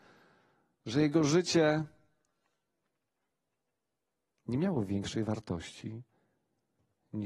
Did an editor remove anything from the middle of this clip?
no; 0 cuts

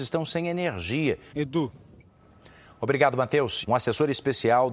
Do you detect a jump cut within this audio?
yes; 2 cuts; at 1.3 s, 3.6 s

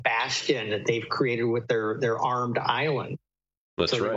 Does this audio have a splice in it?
no; 0 cuts

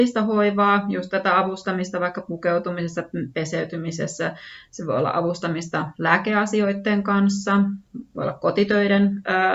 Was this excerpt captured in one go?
yes; 0 cuts

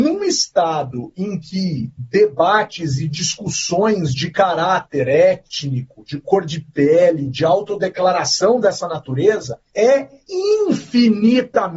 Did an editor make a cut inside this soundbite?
no; 0 cuts

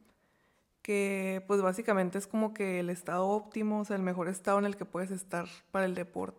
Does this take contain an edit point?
no; 0 cuts

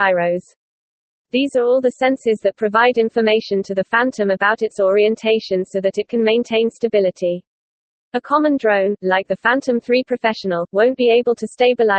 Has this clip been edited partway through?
no; 0 cuts

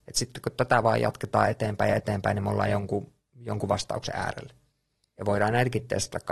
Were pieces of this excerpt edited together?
yes; 1 cut; at 5.1 s

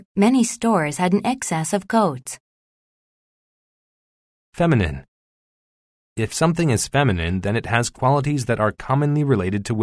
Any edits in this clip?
no; 0 cuts

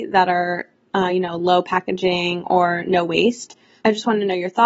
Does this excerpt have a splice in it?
no; 0 cuts

